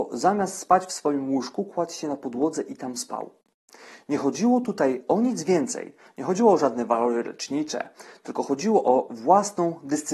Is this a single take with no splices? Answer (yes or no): yes